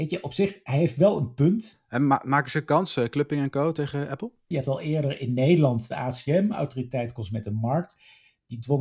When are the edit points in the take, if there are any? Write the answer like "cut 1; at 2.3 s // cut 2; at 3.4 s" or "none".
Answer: cut 1; at 4.5 s